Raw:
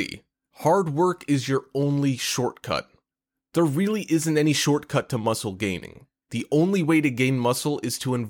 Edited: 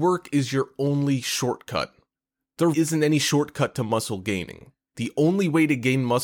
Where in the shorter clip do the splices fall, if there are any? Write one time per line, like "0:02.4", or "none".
0:02.7